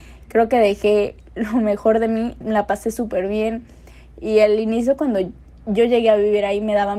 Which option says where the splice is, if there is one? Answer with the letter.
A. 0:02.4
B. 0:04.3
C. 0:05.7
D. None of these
A